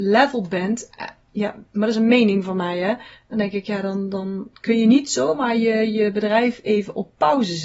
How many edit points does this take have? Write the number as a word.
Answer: zero